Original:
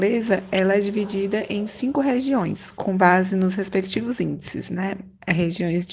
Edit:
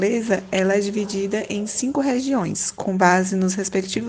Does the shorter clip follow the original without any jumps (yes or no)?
yes